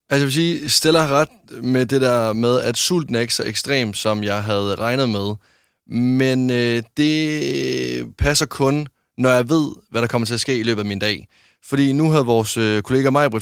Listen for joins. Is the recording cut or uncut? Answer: uncut